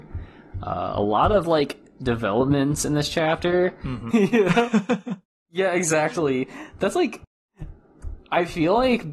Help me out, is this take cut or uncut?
cut